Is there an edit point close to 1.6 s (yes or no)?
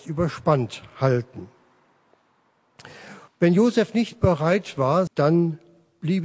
no